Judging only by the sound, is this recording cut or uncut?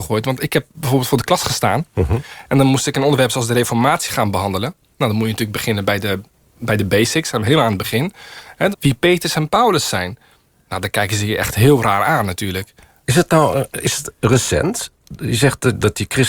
cut